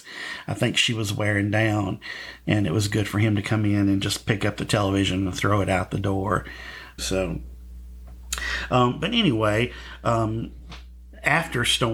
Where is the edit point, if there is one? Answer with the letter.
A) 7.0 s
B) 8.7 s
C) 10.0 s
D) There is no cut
A